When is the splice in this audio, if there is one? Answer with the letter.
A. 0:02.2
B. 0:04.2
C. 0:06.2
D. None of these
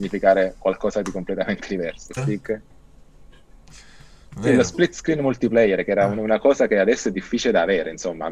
A